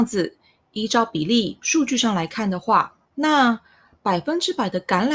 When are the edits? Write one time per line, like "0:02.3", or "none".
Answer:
0:03.0